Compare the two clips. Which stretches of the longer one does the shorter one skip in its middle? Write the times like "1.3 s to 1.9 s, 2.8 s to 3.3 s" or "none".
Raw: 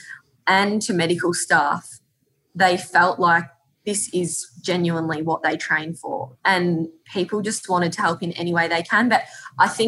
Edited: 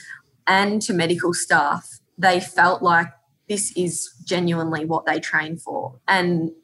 2.1 s to 2.4 s

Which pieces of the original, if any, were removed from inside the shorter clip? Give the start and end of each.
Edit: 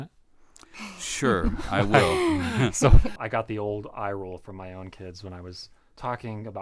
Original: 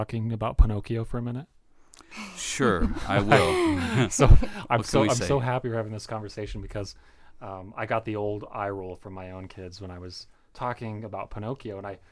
4.5 s to 7.7 s

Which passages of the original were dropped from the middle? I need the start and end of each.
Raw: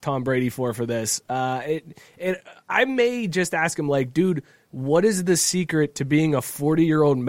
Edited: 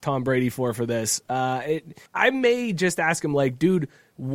2.1 s to 2.6 s

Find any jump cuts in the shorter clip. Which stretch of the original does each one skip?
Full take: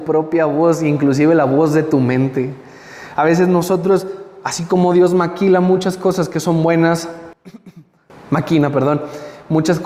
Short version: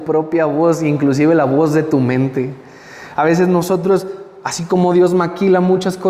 none

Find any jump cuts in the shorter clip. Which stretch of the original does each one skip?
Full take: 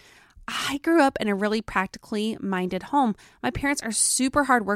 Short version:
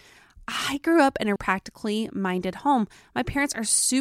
1.4 s to 1.6 s

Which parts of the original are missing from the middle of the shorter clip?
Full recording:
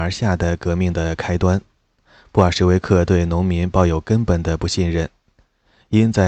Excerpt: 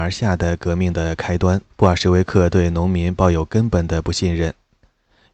1.7 s to 2.3 s

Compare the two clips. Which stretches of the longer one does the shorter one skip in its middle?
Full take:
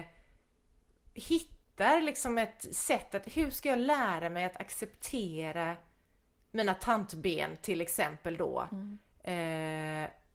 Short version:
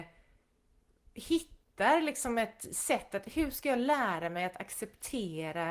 none

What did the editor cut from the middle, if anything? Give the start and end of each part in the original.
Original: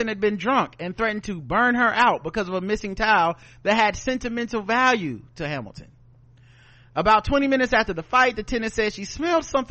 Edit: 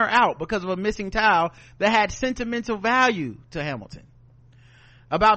none

